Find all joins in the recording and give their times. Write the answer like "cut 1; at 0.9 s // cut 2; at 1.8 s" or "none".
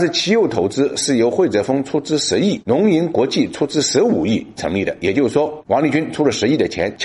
none